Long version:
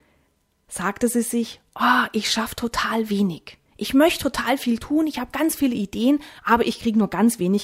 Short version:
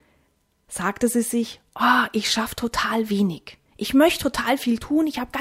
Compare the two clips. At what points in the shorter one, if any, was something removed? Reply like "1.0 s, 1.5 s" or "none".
none